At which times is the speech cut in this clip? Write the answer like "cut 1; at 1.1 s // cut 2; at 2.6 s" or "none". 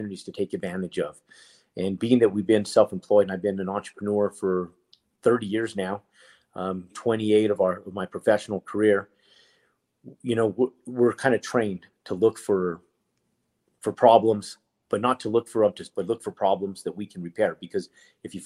cut 1; at 6.9 s // cut 2; at 15.9 s